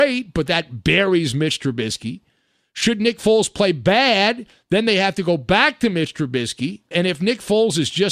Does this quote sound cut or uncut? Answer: cut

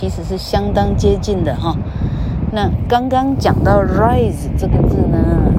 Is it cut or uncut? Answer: cut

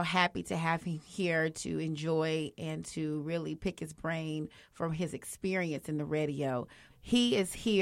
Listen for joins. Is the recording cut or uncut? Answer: cut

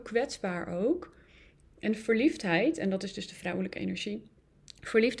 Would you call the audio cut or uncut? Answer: uncut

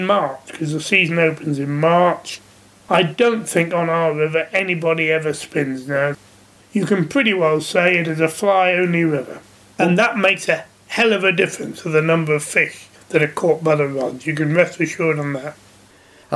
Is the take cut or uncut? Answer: uncut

